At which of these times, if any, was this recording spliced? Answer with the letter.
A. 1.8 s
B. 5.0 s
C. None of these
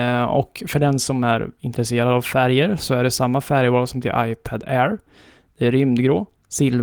C